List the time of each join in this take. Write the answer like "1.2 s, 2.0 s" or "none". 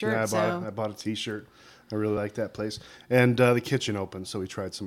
none